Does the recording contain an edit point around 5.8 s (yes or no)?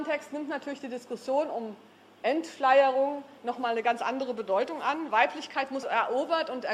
yes